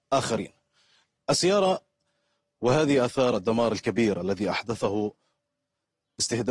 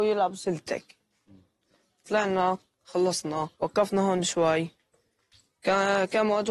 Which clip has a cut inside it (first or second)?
second